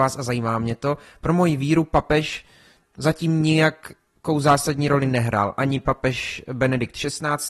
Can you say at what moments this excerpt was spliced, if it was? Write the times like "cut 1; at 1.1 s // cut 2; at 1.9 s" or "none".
none

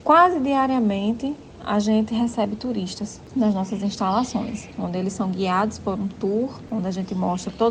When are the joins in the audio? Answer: cut 1; at 6.0 s

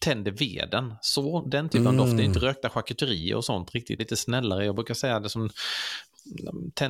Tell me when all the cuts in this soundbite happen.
cut 1; at 4.0 s

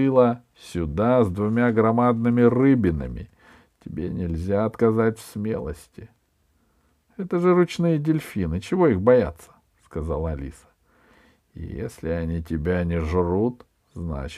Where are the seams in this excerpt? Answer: none

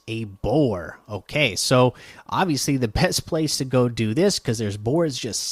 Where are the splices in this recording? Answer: none

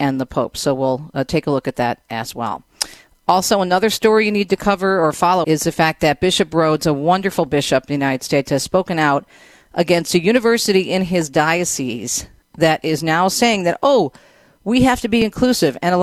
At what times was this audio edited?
cut 1; at 5.4 s // cut 2; at 12.4 s

